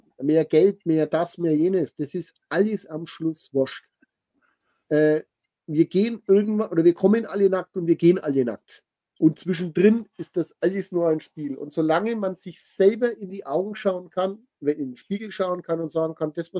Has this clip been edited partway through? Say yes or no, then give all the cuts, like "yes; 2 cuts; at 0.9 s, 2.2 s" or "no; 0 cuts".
no; 0 cuts